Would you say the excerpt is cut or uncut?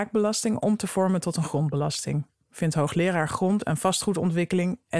uncut